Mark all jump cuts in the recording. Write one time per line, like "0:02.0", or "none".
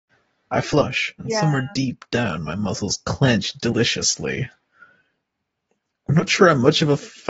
0:01.7